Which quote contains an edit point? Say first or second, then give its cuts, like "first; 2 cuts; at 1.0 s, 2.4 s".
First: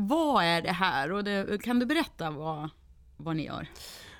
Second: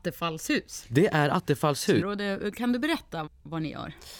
second; 2 cuts; at 2.0 s, 3.3 s